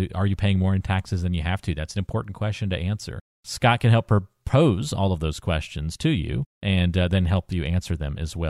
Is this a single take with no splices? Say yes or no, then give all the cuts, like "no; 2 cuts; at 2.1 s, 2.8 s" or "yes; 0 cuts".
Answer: yes; 0 cuts